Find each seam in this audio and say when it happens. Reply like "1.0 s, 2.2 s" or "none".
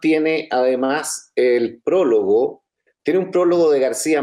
none